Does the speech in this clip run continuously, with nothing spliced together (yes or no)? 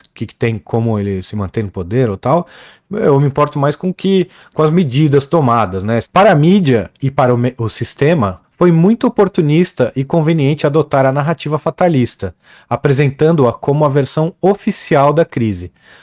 no